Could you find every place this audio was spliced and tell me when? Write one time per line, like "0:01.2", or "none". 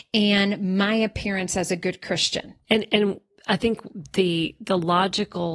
0:02.6

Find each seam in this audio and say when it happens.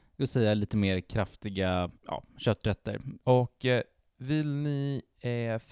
0:02.0
0:03.2

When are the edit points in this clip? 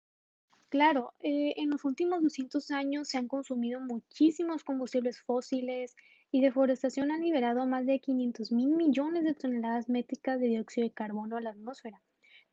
none

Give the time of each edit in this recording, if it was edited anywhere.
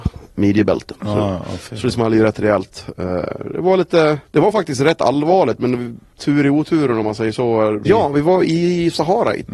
0:07.8

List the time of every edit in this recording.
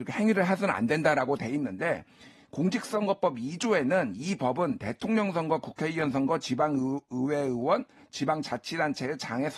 none

